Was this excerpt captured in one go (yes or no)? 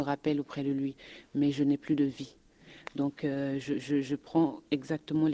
yes